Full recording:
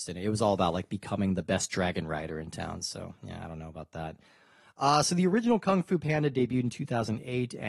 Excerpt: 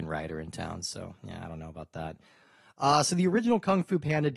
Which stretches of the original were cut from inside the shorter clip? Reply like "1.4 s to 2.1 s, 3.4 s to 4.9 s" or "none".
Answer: none

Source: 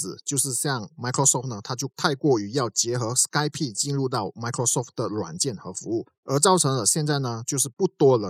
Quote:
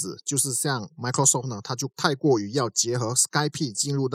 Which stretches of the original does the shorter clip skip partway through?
none

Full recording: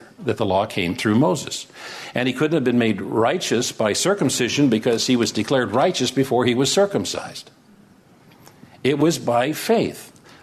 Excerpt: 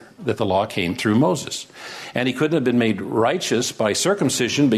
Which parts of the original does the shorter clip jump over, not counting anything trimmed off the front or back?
none

